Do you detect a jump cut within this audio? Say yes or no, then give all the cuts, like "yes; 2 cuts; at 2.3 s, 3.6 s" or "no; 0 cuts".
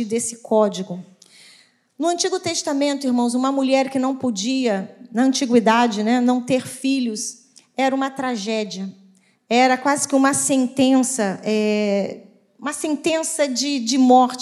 no; 0 cuts